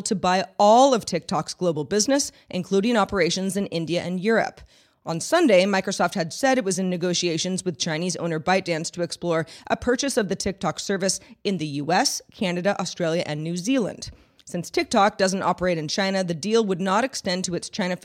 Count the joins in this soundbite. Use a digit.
0